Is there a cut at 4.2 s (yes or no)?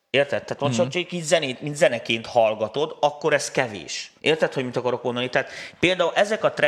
yes